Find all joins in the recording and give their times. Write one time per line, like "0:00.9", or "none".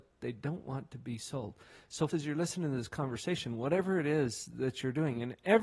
0:02.1